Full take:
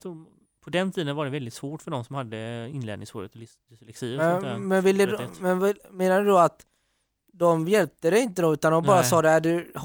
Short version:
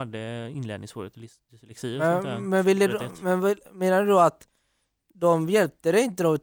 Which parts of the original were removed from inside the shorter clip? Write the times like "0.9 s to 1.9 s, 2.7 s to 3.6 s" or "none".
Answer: none